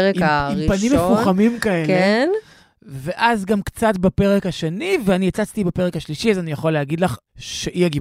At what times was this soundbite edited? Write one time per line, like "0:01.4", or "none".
none